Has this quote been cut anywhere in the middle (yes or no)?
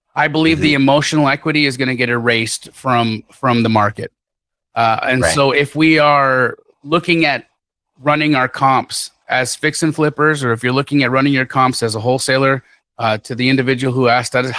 no